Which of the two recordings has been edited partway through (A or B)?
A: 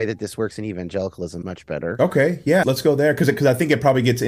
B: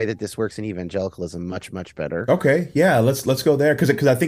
A